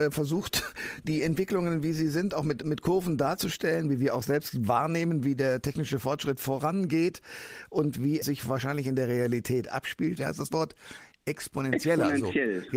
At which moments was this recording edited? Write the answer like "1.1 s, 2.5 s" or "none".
1.0 s, 8.2 s, 10.2 s